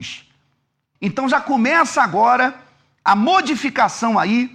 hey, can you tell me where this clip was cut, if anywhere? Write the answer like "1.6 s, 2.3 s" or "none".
1.0 s, 3.1 s